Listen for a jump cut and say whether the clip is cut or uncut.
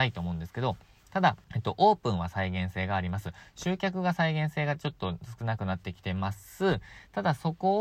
cut